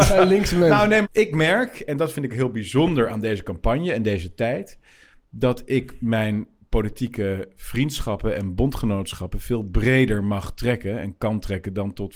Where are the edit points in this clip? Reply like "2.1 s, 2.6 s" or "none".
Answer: 1.0 s